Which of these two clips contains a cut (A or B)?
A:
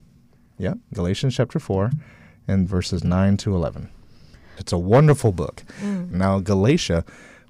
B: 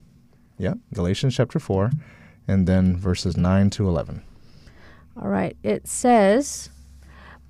A